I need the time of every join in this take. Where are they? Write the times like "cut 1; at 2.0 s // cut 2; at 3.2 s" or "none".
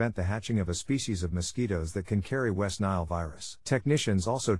cut 1; at 3.6 s

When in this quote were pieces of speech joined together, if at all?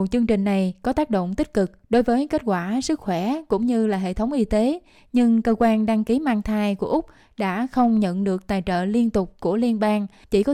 none

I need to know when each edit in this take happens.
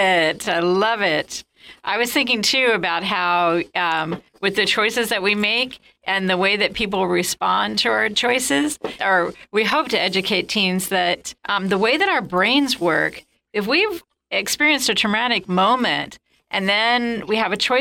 cut 1; at 9.0 s // cut 2; at 11.4 s

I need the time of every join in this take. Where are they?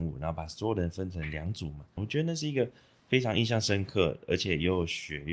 cut 1; at 2.0 s

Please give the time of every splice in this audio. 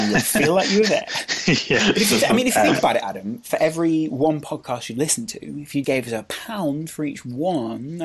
cut 1; at 5.8 s

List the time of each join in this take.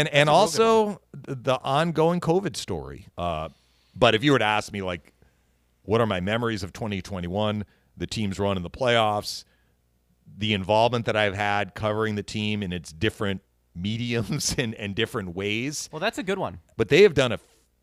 cut 1; at 3.1 s // cut 2; at 16.7 s

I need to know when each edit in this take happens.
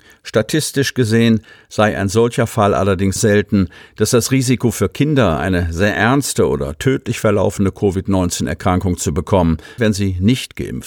cut 1; at 3.2 s // cut 2; at 9.8 s

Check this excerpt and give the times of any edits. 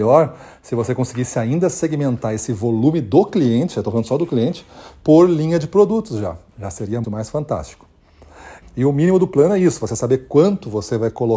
cut 1; at 7.0 s // cut 2; at 8.6 s

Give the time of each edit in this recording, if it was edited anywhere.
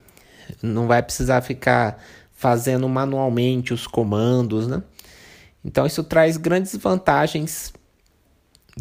none

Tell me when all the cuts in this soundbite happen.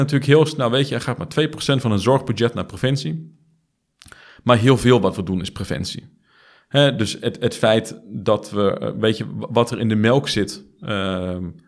none

